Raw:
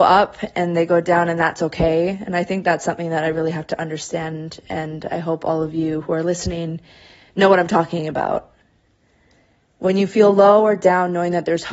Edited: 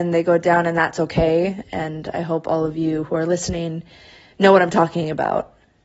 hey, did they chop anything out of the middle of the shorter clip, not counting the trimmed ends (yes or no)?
yes